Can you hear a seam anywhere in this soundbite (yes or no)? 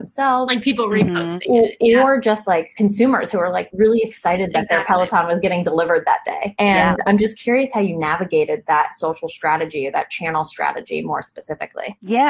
no